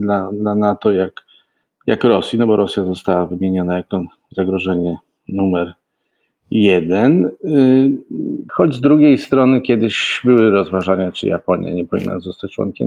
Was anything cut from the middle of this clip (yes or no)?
yes